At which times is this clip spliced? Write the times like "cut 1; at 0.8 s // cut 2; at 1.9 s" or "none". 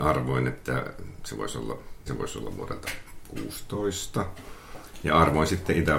cut 1; at 2.1 s